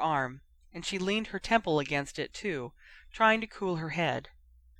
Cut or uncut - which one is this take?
uncut